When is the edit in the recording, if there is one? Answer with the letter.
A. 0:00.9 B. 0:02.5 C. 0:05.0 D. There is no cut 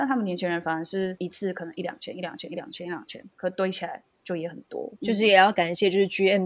C